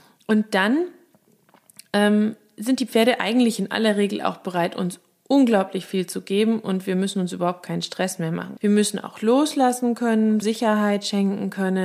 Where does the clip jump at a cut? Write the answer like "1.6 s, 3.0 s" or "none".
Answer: 8.6 s, 10.4 s